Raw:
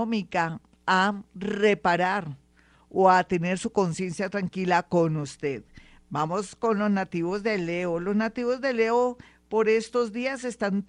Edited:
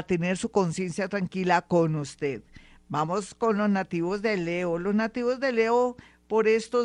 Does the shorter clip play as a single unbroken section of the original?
yes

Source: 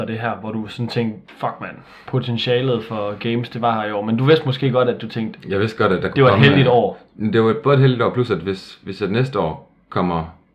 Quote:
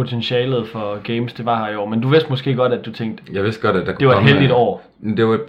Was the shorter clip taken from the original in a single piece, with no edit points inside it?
yes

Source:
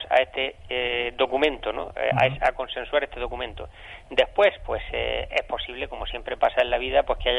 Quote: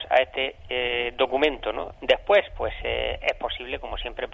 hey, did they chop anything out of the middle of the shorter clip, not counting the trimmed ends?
yes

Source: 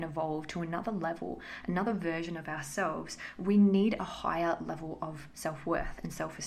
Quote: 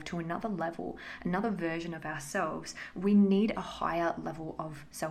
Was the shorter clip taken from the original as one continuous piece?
yes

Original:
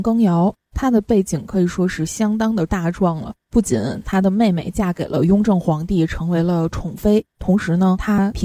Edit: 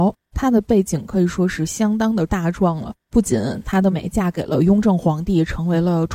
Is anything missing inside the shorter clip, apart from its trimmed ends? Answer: yes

